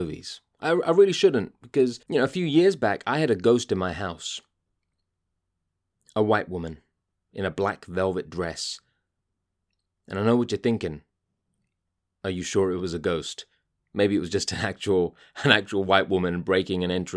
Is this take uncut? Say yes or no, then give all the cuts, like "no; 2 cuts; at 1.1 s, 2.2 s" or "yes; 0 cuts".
yes; 0 cuts